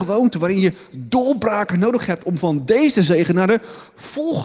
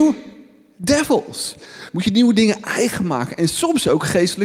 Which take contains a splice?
second; 1 cut; at 1.9 s

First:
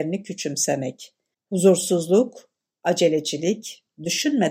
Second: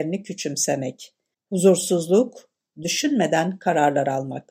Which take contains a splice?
second; 1 cut; at 2.7 s

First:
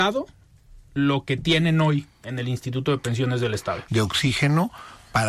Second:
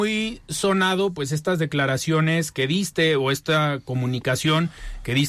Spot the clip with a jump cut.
first; 1 cut; at 3.9 s

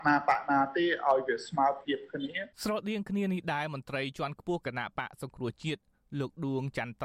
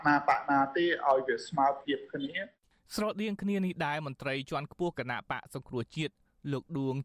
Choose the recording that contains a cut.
first; 1 cut; at 2.5 s

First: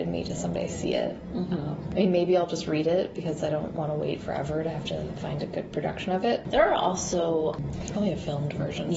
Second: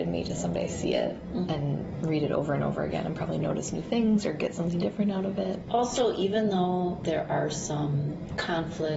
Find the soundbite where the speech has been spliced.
second; 1 cut; at 1.5 s

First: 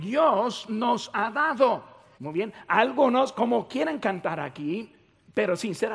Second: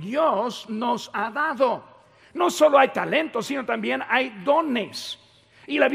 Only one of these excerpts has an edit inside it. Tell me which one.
first; 1 cut; at 2.1 s

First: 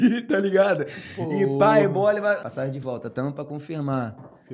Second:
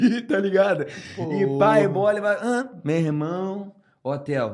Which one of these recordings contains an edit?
first; 1 cut; at 2.4 s

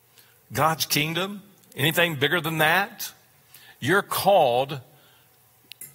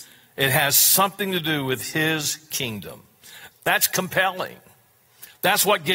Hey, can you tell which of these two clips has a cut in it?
second; 1 cut; at 3.5 s

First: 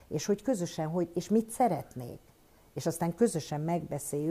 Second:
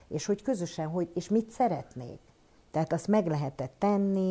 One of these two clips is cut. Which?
second; 1 cut; at 2.6 s

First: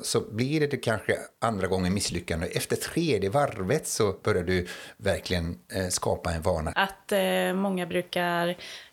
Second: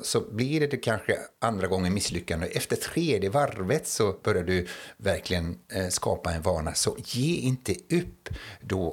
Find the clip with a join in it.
first; 1 cut; at 6.7 s

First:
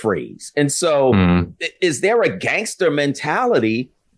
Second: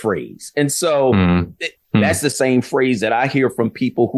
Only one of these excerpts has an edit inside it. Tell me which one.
second; 1 cut; at 1.8 s

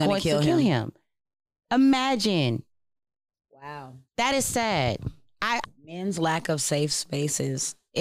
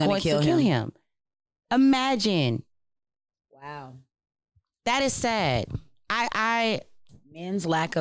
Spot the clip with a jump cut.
first; 2 cuts; at 4.1 s, 5.6 s

